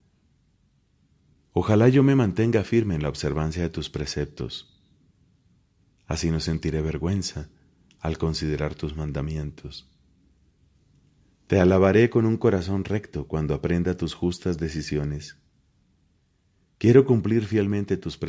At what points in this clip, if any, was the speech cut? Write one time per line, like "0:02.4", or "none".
none